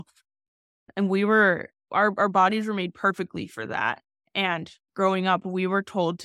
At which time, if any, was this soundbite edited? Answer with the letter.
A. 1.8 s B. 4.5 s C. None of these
A